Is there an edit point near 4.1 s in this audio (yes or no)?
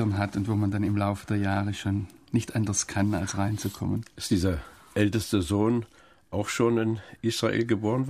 no